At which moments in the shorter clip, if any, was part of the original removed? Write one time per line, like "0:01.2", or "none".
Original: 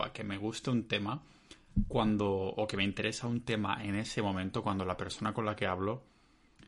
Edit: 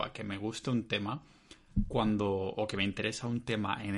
none